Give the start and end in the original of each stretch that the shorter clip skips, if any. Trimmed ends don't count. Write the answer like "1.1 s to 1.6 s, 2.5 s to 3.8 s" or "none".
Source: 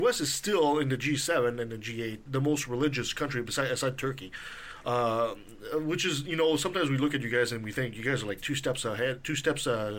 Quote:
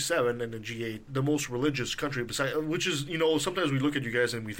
3.7 s to 5.7 s